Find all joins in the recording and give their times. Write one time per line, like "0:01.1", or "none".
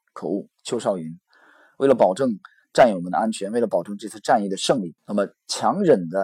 0:05.0